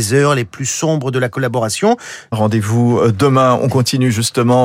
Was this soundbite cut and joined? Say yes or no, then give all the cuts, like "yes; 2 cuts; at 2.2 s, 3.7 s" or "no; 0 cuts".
yes; 1 cut; at 2.3 s